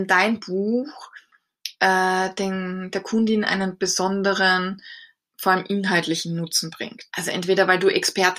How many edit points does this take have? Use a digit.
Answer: 1